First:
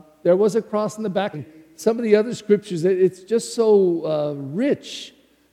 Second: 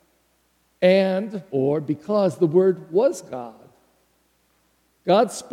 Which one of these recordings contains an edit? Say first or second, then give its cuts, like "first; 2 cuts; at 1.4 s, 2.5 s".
first; 1 cut; at 1.3 s